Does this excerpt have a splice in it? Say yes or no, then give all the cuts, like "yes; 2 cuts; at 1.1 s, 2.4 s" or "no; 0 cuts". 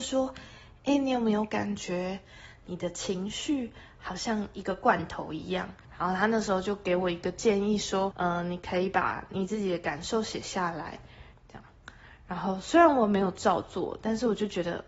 yes; 3 cuts; at 5.8 s, 8.1 s, 11.4 s